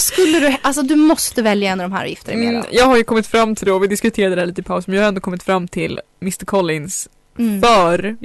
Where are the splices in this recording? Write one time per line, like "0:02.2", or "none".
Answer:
none